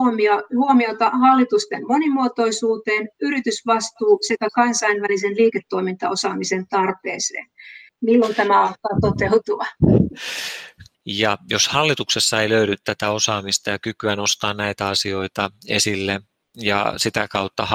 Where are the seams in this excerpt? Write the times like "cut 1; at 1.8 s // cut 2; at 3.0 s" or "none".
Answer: cut 1; at 7.9 s // cut 2; at 10.9 s